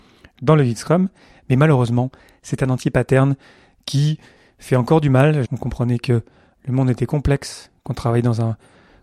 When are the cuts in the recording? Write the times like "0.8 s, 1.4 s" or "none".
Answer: 5.4 s